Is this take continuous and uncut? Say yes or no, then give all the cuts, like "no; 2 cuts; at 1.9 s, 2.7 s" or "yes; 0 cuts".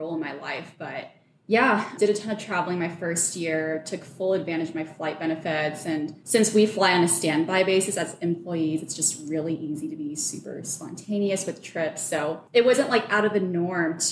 yes; 0 cuts